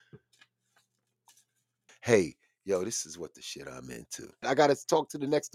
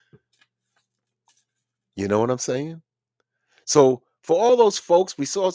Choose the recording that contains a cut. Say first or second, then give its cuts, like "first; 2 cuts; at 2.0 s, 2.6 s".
first; 2 cuts; at 1.9 s, 4.4 s